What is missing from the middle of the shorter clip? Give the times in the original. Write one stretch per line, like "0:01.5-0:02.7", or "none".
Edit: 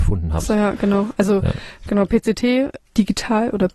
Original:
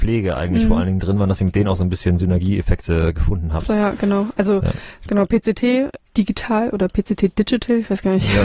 none